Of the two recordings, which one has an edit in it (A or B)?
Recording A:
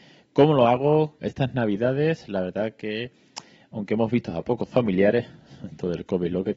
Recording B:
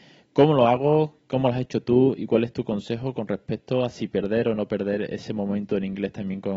A